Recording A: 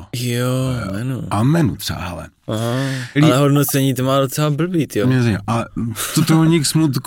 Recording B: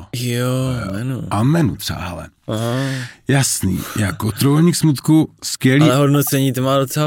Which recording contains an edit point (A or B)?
A